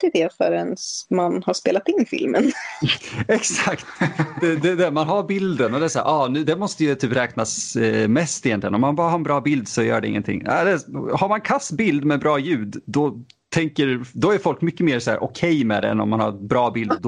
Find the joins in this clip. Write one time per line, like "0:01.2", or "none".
none